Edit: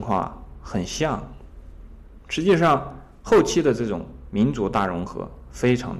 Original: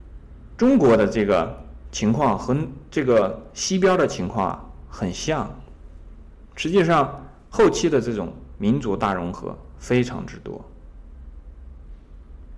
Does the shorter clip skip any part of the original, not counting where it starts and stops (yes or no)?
no